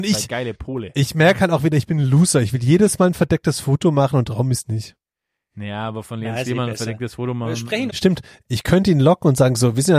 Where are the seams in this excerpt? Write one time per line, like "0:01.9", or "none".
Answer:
0:07.9